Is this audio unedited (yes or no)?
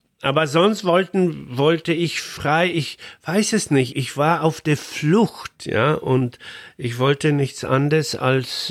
no